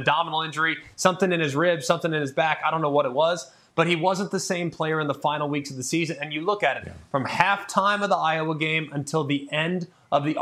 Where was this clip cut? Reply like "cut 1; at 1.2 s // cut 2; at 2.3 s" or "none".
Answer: none